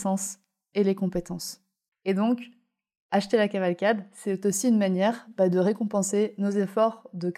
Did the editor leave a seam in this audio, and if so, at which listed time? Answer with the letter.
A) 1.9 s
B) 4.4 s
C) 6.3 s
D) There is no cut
A